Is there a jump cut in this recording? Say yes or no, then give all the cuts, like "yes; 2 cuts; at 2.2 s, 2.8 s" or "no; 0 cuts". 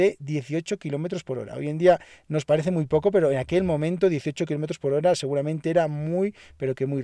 no; 0 cuts